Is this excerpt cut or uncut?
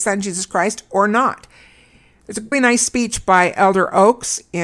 cut